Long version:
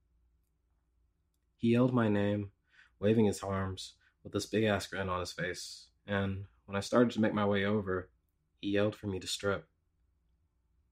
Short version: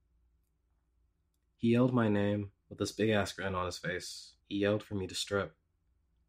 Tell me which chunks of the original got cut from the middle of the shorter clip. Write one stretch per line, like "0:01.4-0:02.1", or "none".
0:02.6-0:04.2
0:05.9-0:08.5